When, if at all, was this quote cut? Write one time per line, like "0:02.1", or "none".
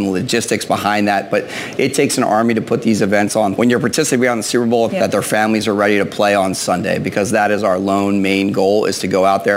0:03.6
0:04.9